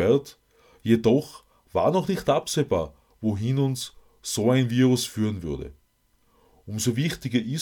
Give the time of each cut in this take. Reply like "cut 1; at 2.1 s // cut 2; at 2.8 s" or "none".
none